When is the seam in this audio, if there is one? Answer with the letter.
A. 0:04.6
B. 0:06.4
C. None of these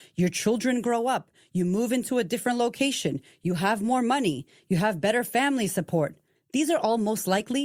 B